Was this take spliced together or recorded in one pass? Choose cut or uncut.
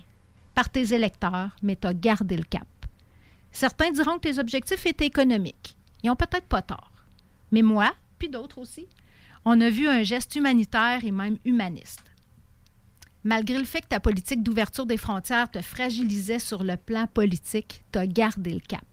uncut